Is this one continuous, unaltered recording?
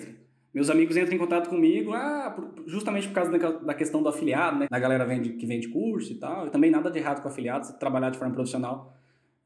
no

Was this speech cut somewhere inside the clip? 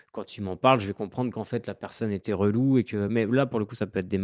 no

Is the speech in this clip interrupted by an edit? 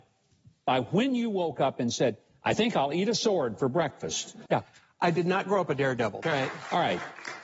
yes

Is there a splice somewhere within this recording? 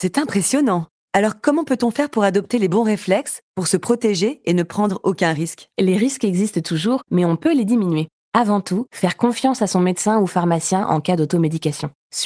no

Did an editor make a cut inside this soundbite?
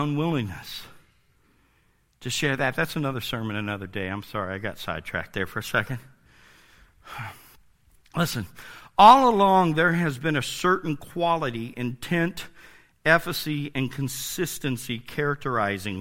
no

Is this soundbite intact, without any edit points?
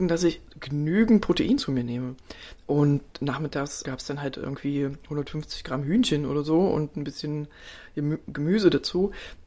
no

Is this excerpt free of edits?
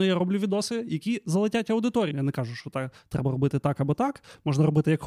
no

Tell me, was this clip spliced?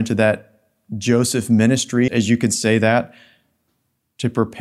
yes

